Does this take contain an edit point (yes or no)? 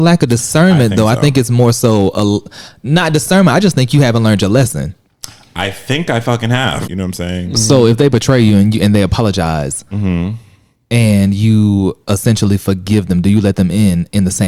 yes